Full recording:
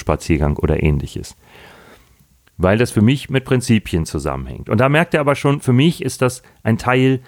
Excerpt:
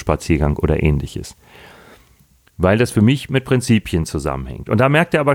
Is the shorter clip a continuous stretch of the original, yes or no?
yes